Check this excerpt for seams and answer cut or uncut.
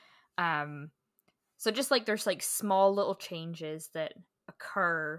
uncut